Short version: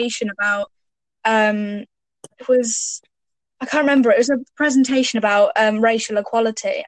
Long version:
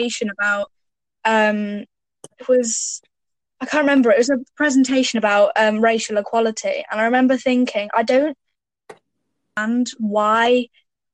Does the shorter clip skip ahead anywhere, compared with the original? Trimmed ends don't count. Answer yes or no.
no